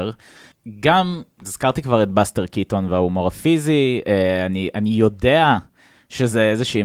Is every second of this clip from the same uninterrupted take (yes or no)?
no